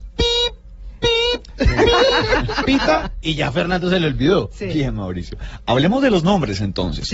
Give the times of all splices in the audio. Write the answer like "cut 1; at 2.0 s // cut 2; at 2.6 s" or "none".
none